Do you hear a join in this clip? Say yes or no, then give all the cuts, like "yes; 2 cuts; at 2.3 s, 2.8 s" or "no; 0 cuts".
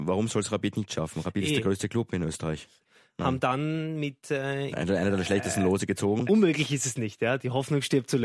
yes; 3 cuts; at 2.8 s, 4.7 s, 6.3 s